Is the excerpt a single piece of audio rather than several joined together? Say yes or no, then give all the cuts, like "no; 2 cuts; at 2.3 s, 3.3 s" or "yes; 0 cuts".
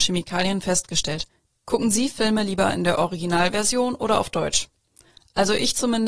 no; 1 cut; at 1.4 s